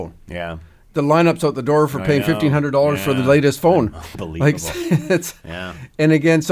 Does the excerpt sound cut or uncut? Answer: uncut